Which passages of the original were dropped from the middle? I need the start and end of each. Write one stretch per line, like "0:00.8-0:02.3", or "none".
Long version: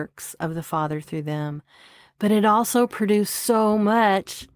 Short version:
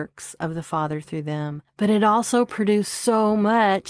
0:01.7-0:02.1